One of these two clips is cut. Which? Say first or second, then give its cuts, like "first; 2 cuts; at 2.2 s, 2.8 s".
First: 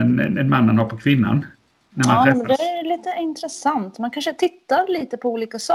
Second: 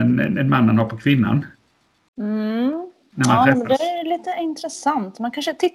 first; 1 cut; at 1.9 s